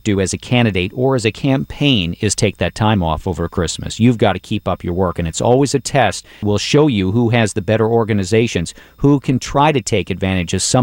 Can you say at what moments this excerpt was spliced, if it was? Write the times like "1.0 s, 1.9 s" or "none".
6.4 s